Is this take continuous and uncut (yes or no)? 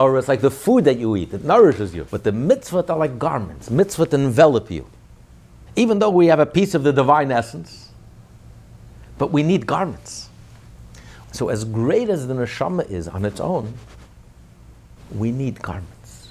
no